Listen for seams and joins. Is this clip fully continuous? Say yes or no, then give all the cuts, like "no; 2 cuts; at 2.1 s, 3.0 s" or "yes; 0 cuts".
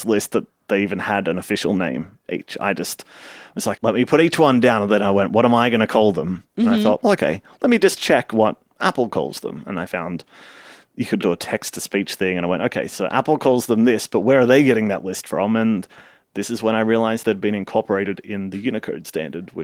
no; 1 cut; at 3.8 s